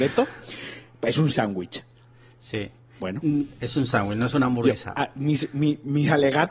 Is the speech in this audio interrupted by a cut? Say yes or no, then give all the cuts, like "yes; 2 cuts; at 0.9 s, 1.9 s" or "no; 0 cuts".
no; 0 cuts